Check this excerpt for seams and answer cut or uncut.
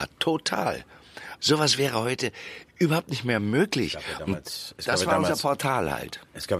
cut